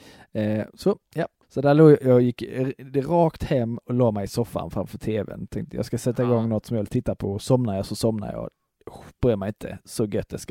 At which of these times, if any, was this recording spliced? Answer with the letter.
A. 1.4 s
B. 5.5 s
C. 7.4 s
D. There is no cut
A